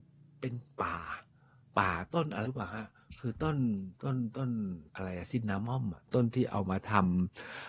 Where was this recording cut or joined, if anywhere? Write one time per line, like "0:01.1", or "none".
0:02.4
0:04.9

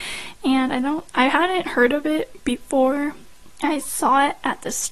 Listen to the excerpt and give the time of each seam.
none

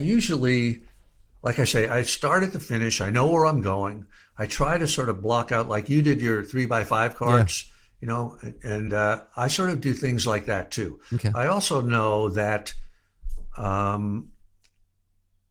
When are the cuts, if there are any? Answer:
none

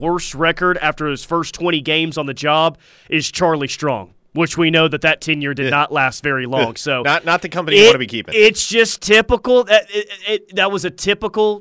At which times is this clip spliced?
none

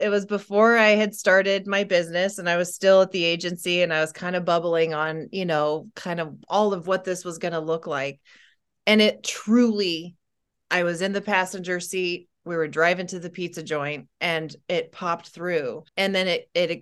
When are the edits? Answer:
0:15.9

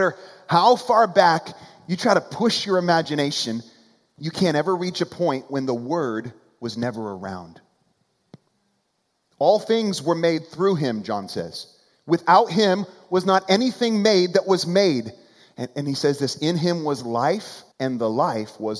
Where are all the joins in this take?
0:17.7

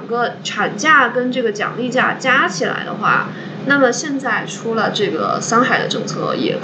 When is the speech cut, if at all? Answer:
0:03.6

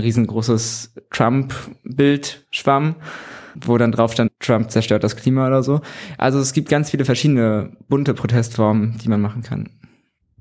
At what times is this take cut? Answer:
none

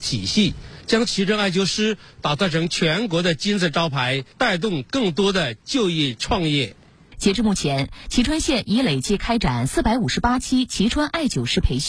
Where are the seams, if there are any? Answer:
none

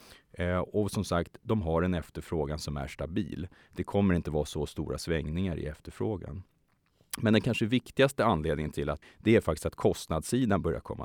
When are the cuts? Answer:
0:09.0

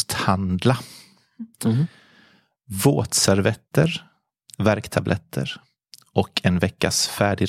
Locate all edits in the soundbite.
0:01.5

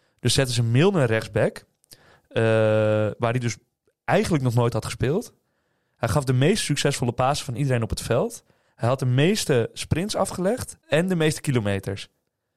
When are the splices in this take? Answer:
0:10.8

